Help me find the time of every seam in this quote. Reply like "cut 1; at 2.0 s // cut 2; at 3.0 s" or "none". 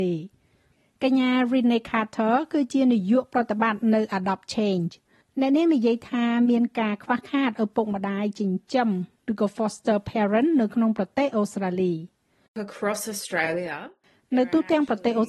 none